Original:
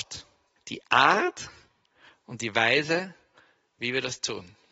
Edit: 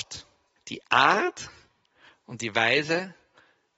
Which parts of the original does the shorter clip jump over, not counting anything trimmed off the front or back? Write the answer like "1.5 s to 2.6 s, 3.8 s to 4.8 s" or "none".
none